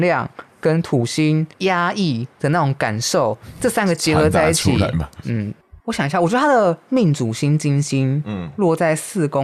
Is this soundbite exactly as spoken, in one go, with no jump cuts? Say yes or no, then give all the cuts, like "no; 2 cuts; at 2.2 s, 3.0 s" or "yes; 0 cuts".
no; 1 cut; at 5.8 s